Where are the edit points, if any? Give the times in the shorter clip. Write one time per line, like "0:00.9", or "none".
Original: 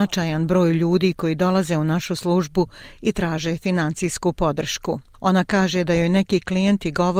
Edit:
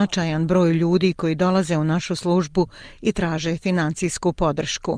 none